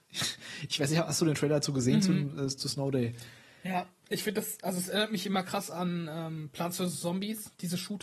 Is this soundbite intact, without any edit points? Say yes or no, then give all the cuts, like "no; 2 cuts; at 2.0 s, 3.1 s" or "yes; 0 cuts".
yes; 0 cuts